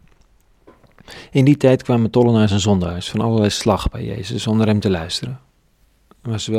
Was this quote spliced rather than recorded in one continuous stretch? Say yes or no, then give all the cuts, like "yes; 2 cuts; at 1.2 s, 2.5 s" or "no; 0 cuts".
no; 0 cuts